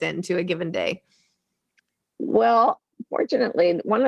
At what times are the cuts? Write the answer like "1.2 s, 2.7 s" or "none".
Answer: none